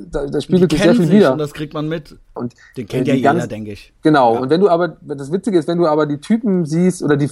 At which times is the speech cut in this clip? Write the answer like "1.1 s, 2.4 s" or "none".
2.4 s